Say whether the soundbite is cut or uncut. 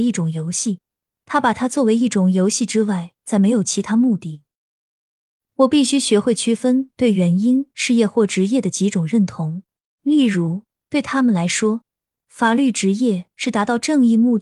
cut